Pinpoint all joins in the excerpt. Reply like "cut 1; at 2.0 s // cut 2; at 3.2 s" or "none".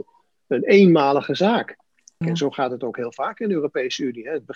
cut 1; at 2.2 s